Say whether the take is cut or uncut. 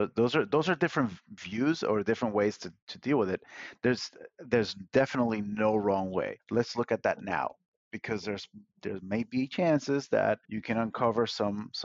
cut